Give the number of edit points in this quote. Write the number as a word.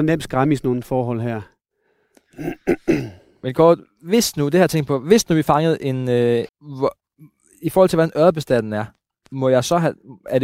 one